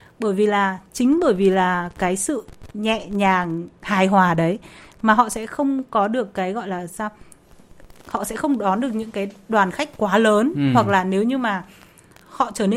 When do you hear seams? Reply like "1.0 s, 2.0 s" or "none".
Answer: none